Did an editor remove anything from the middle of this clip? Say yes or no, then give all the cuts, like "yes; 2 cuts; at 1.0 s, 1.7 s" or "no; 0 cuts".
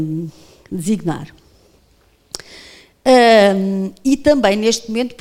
no; 0 cuts